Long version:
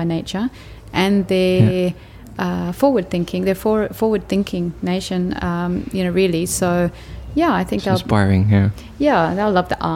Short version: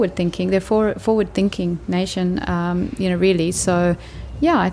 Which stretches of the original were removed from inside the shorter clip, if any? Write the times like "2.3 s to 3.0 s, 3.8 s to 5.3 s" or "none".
none